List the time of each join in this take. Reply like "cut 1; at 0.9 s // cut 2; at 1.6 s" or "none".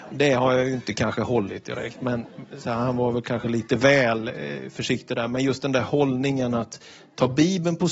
none

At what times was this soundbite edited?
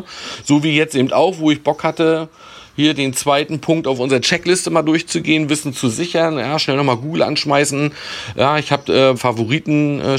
cut 1; at 9.2 s

